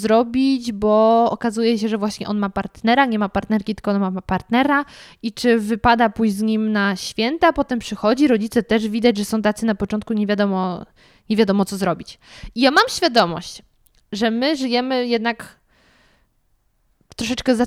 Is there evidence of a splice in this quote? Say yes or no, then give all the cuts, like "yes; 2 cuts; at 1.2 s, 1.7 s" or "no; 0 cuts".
no; 0 cuts